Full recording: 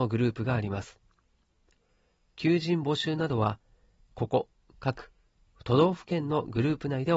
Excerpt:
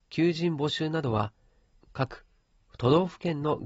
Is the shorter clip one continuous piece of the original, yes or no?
no